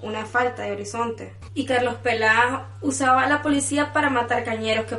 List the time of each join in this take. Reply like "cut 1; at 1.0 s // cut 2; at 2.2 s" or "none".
cut 1; at 1.5 s